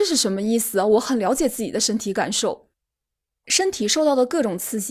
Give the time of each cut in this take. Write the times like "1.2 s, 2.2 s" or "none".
3.4 s